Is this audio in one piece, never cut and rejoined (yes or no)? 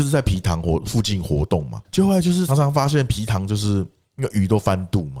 no